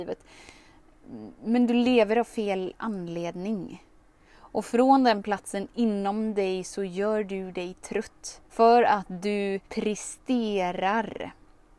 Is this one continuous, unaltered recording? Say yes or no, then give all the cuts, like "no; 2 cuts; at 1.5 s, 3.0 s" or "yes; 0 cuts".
no; 2 cuts; at 8.5 s, 9.7 s